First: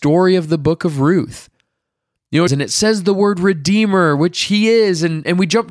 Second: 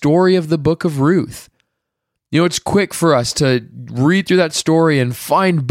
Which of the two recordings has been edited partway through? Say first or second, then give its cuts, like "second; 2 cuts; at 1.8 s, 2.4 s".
first; 1 cut; at 2.5 s